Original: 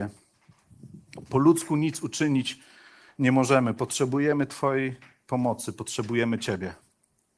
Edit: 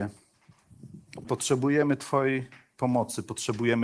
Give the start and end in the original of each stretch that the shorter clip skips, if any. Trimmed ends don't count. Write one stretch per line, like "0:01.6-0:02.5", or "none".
0:01.2-0:03.7